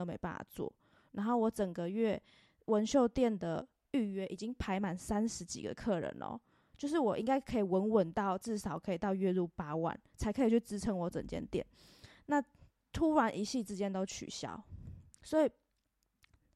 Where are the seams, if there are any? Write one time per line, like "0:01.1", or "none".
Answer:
none